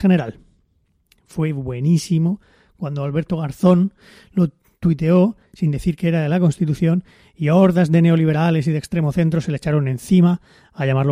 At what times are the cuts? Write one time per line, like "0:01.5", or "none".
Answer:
none